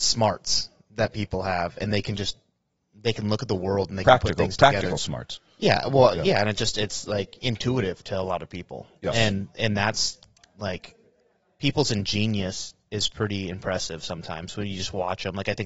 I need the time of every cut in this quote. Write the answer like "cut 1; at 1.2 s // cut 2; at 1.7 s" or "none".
none